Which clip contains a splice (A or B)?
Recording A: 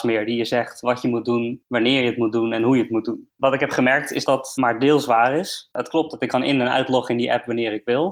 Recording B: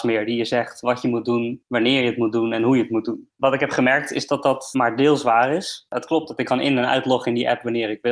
A